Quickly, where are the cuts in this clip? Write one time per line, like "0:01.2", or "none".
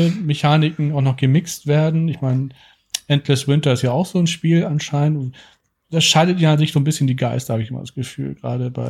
none